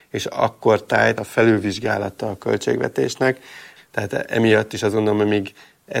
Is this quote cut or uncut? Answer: cut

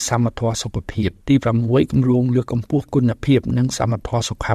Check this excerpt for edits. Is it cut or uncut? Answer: cut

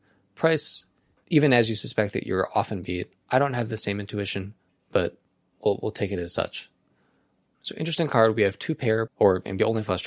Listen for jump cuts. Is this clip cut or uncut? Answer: cut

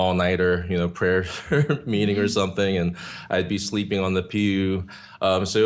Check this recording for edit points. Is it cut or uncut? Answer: uncut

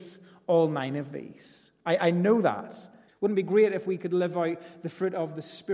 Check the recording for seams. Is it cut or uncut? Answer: cut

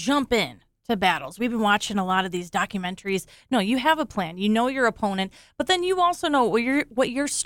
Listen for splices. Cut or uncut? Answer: uncut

